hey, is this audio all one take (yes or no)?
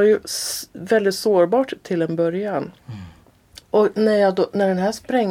no